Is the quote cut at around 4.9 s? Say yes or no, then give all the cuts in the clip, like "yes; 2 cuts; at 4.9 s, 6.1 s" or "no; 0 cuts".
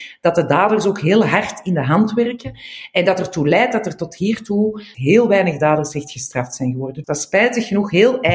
yes; 2 cuts; at 4.9 s, 7.0 s